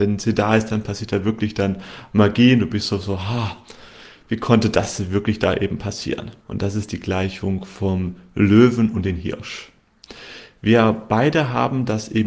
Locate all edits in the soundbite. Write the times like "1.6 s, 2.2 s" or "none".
6.4 s